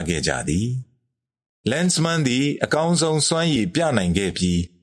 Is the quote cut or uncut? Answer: uncut